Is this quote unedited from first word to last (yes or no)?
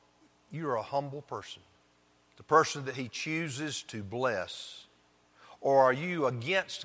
yes